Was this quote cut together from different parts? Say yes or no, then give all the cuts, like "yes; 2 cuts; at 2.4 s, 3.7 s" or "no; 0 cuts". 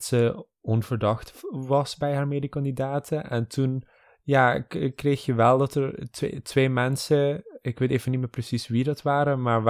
no; 0 cuts